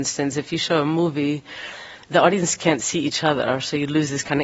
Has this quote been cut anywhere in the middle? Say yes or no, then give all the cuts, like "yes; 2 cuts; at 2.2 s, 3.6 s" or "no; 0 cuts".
no; 0 cuts